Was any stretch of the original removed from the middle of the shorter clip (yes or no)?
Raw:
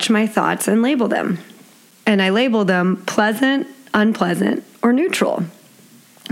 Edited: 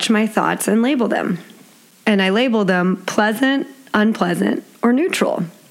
no